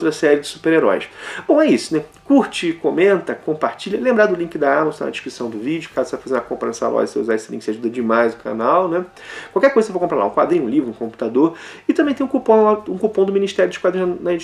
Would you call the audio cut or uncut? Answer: uncut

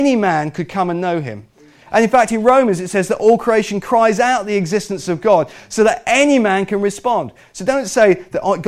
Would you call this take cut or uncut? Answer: uncut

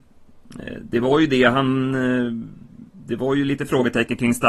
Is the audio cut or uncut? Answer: uncut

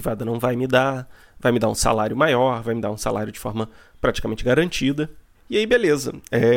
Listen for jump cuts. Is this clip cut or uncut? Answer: cut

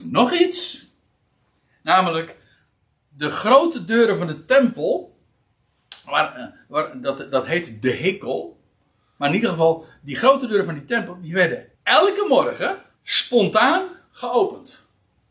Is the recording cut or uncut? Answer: cut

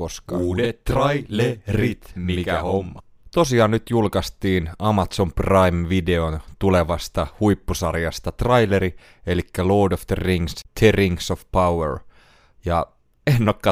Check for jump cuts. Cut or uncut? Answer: uncut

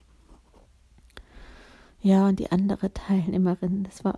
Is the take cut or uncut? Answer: uncut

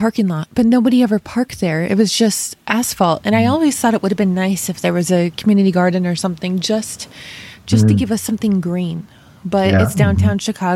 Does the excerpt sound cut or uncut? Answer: uncut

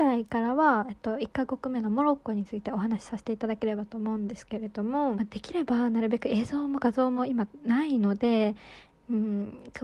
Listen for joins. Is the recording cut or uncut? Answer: cut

